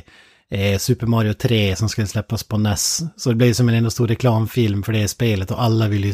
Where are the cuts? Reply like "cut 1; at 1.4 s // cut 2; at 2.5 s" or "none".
none